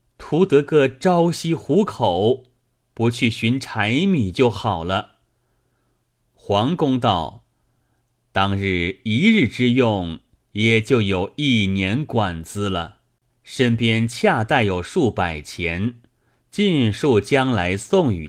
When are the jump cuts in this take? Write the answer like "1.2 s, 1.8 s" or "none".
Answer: 13.3 s